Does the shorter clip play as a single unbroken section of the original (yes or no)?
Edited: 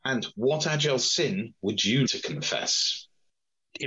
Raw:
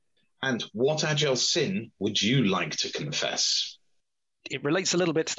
no